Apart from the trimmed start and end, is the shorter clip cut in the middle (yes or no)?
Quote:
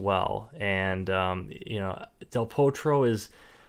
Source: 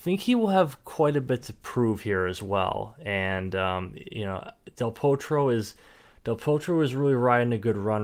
no